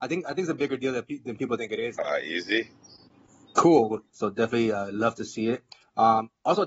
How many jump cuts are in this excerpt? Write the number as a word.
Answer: two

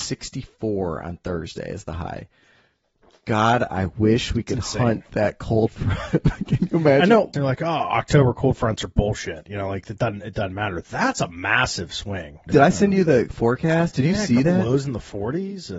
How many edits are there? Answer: two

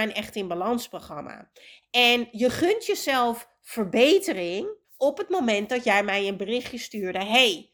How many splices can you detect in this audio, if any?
one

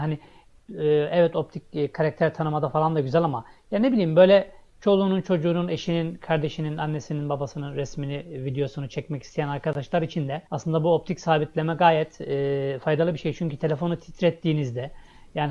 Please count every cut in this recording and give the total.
one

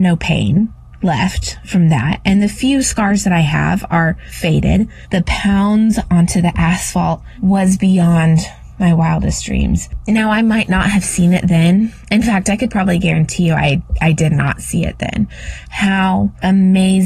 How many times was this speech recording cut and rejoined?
one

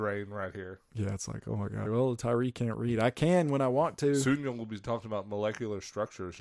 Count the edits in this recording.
one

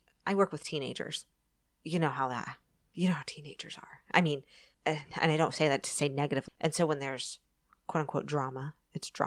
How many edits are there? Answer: one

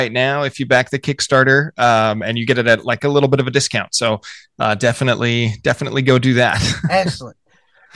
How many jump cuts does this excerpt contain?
zero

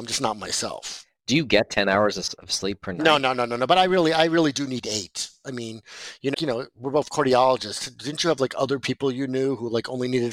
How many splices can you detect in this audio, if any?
one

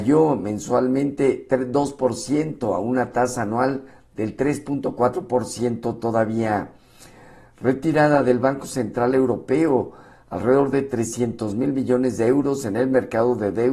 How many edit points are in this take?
zero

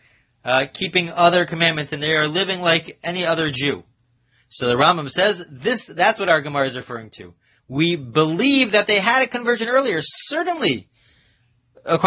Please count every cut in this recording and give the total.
zero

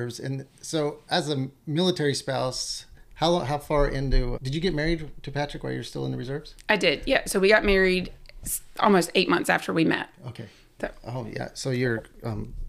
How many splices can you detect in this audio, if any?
one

